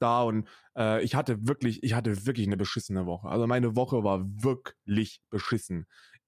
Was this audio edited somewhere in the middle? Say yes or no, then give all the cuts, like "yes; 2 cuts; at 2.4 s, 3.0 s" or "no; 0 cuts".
no; 0 cuts